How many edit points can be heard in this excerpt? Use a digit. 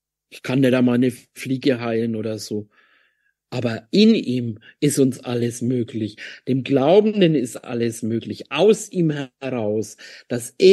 0